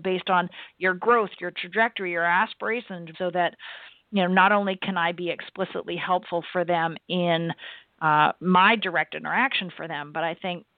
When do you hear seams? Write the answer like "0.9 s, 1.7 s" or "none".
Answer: 3.1 s